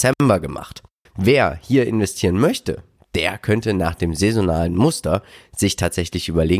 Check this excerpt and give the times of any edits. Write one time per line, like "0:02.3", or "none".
0:01.1